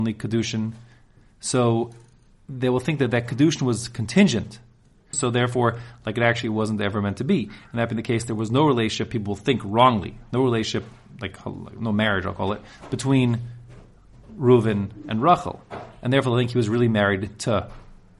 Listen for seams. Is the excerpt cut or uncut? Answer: cut